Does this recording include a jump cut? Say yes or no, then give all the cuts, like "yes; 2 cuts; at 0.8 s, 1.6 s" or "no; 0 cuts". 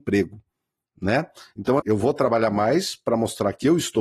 yes; 1 cut; at 1.8 s